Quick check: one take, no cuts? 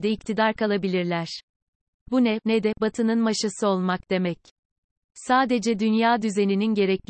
no; 1 cut; at 2.4 s

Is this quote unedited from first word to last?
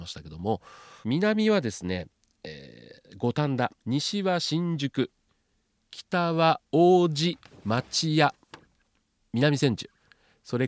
no; 1 cut; at 3.8 s

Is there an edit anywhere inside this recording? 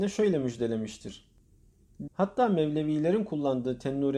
yes; 1 cut; at 2.1 s

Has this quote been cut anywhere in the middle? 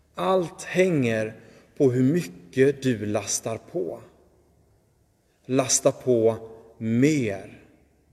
no; 0 cuts

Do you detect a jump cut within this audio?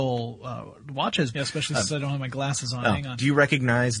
yes; 1 cut; at 1.3 s

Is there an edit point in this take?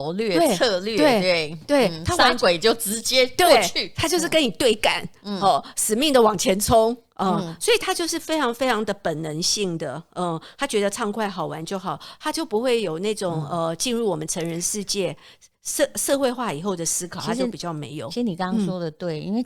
no; 0 cuts

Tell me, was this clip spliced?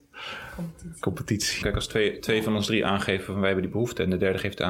yes; 1 cut; at 1.6 s

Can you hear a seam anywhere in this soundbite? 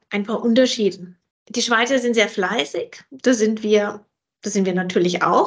no; 0 cuts

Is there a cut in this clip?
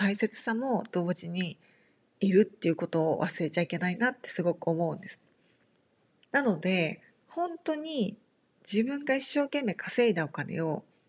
yes; 1 cut; at 6.2 s

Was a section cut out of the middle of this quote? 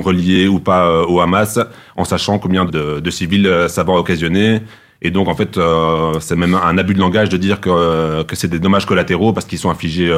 yes; 1 cut; at 2.7 s

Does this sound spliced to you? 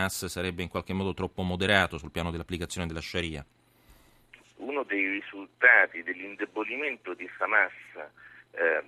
yes; 1 cut; at 4.4 s

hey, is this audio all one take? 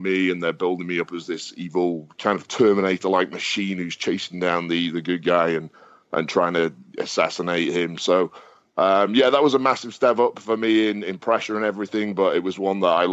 yes; 0 cuts

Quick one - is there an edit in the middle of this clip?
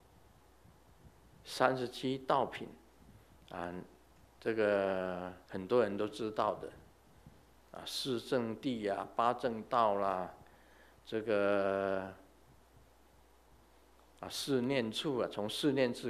yes; 2 cuts; at 1.3 s, 5.4 s

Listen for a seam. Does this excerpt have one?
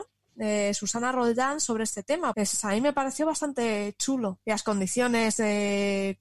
yes; 2 cuts; at 2.3 s, 4.4 s

